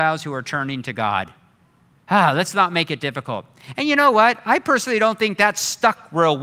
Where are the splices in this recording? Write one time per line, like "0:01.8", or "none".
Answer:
none

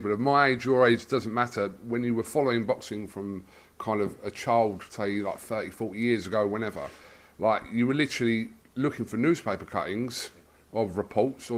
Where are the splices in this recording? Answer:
none

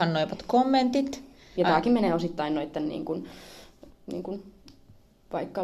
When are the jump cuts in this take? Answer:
0:01.5
0:03.9

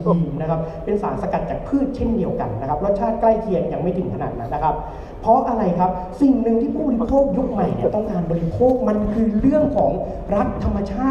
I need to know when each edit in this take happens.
0:04.5

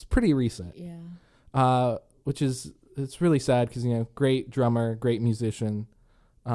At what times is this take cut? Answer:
none

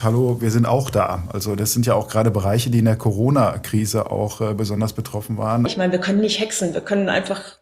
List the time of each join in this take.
0:05.7

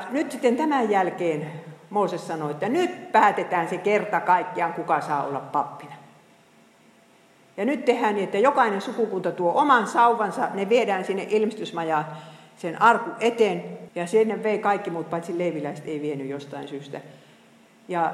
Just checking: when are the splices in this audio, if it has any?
0:13.9

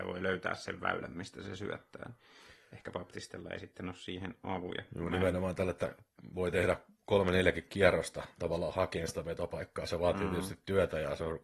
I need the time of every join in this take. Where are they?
none

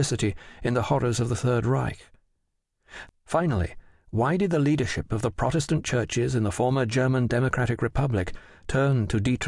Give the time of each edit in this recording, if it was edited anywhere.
0:03.1

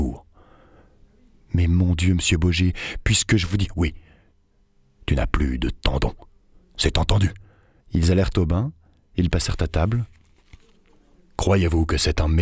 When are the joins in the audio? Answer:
0:07.8

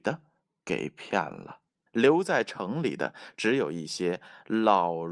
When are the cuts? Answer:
0:01.9

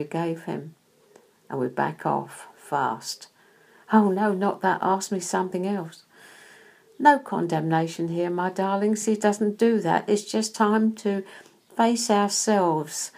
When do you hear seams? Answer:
none

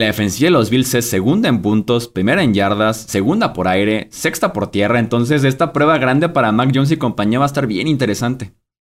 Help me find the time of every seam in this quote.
none

